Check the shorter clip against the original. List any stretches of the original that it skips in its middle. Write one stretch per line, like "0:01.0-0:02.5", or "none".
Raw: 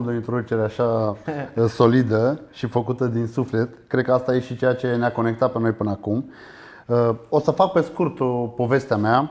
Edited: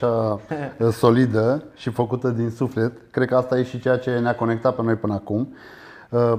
none